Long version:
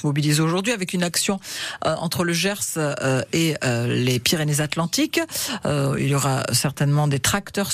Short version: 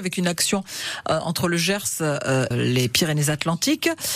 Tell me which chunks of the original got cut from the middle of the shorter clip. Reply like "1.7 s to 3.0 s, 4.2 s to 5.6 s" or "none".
3.3 s to 3.8 s